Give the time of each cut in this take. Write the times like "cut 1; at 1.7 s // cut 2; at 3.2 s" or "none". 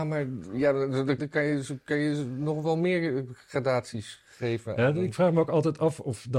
cut 1; at 1.2 s